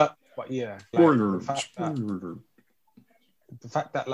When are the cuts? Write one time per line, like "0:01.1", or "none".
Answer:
0:00.9